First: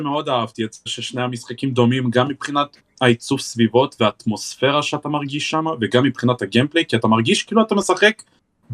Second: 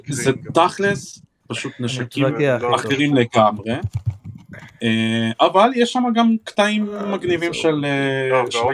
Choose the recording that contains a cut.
second; 1 cut; at 1.4 s

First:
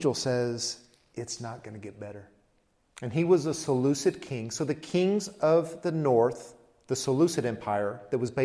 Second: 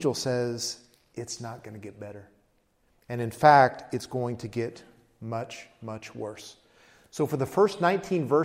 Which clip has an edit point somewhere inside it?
first; 1 cut; at 2.8 s

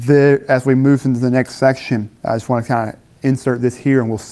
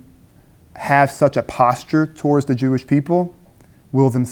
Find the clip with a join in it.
first; 1 cut; at 2.2 s

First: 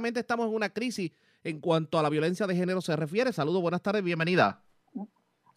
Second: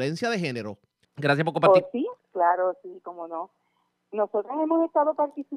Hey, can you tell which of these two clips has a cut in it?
second; 2 cuts; at 1.0 s, 2.2 s

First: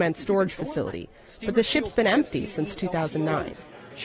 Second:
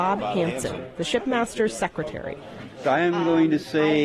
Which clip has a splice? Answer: second; 1 cut; at 2.8 s

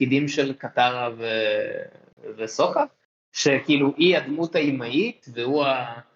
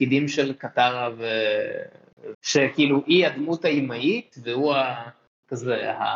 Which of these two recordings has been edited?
second; 1 cut; at 2.3 s

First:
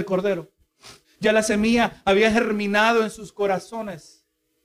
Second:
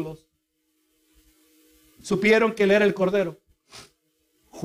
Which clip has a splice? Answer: first; 1 cut; at 1.0 s

